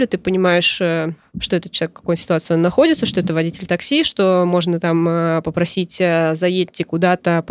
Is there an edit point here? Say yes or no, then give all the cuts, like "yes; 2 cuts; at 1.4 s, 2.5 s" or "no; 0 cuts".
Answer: no; 0 cuts